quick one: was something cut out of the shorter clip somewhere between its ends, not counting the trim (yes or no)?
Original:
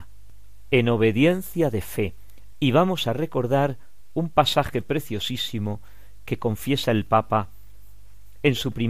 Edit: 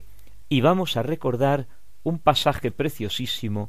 no